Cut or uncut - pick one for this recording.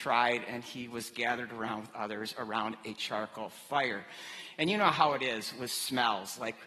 uncut